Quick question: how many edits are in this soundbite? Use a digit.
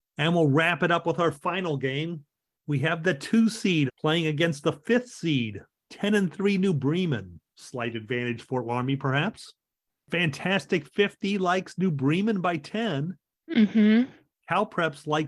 3